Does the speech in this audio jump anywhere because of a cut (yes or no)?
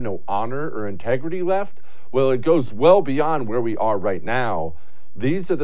no